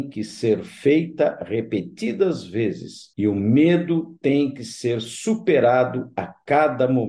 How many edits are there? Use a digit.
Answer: 1